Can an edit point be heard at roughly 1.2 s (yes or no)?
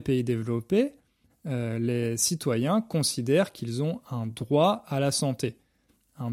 no